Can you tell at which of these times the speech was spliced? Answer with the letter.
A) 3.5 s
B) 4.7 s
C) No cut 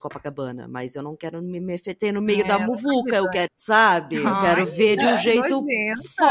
A